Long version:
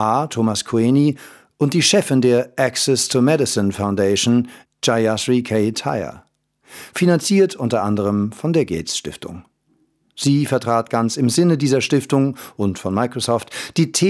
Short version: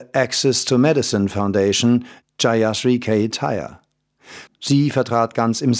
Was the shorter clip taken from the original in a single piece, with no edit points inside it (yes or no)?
no